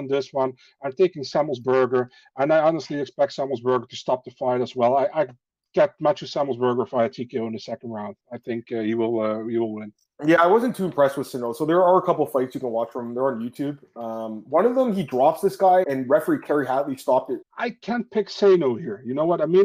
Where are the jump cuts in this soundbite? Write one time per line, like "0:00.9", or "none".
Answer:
0:15.8
0:17.4